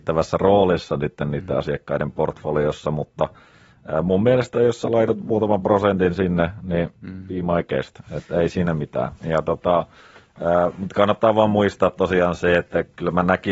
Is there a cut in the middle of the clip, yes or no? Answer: yes